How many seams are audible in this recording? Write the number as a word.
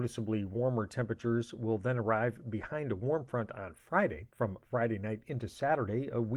one